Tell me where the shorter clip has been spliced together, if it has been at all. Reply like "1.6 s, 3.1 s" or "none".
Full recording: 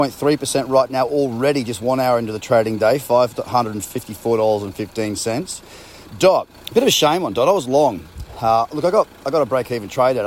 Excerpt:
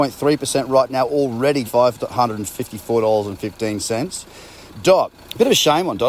1.6 s